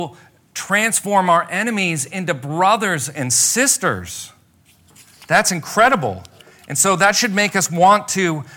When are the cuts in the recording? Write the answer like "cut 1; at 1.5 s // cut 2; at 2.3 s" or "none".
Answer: none